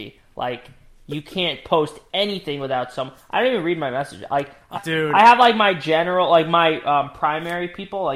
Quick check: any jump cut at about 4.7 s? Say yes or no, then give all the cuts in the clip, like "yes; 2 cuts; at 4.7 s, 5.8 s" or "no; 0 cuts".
yes; 1 cut; at 4.7 s